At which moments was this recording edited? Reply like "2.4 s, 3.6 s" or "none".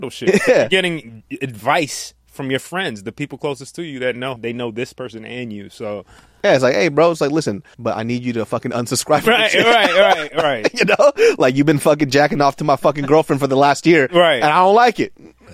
4.4 s, 7.7 s